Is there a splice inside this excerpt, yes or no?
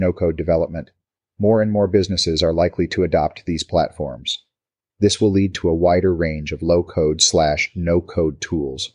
no